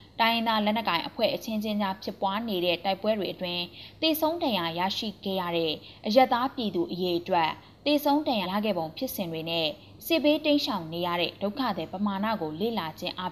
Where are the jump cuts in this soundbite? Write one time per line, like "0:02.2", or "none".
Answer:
0:08.4